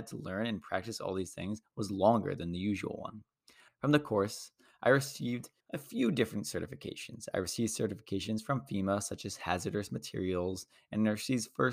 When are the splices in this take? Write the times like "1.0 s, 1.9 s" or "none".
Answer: 3.7 s, 5.6 s